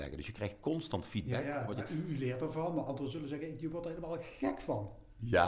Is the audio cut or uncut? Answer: uncut